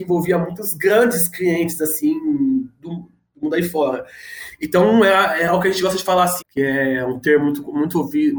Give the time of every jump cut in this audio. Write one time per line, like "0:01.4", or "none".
0:06.4